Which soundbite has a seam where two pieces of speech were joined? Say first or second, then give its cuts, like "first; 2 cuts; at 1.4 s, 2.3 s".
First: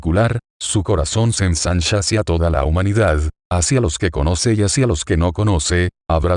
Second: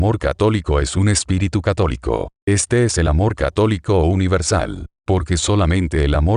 second; 2 cuts; at 2.4 s, 4.9 s